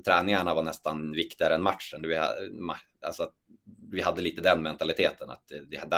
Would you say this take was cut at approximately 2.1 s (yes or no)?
no